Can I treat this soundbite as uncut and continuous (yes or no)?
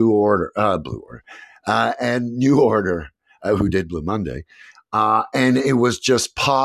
yes